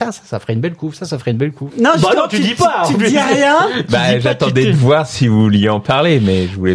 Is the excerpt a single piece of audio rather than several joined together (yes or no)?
no